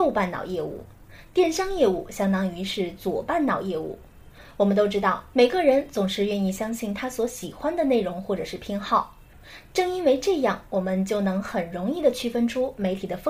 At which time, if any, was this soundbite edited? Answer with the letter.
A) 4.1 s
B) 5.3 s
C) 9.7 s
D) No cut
B